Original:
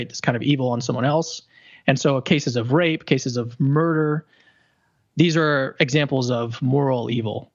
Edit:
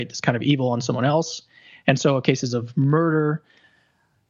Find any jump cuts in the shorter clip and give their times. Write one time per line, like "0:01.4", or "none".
0:02.2